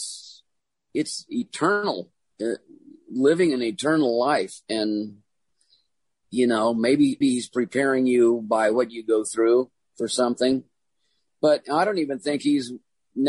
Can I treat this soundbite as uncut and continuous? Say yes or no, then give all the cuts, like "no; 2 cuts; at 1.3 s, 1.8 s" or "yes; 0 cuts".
no; 1 cut; at 7.2 s